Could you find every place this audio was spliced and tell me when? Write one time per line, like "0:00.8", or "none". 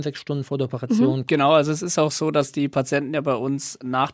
0:01.3